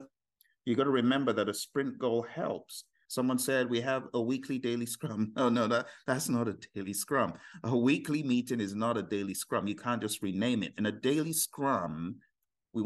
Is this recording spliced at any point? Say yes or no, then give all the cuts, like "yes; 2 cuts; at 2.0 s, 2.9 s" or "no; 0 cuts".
yes; 1 cut; at 3.1 s